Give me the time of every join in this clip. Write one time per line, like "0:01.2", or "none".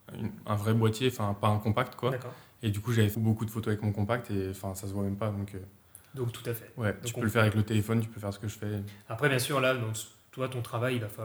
0:03.1